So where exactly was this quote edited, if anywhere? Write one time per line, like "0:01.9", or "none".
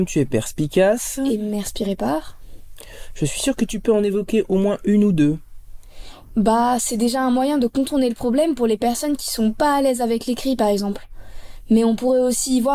none